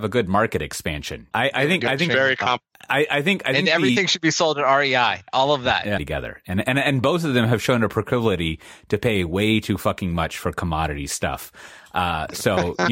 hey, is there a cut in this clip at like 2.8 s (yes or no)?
no